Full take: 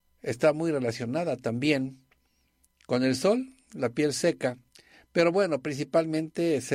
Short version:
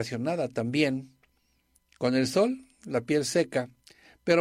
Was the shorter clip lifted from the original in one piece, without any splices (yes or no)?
yes